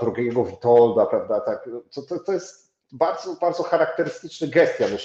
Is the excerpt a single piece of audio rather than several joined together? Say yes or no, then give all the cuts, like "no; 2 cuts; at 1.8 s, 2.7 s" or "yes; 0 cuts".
yes; 0 cuts